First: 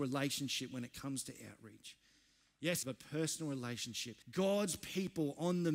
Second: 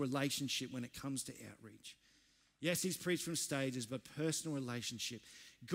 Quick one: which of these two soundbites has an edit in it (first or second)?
first